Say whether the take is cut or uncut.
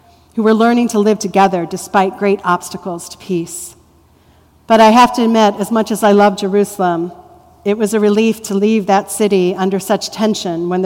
uncut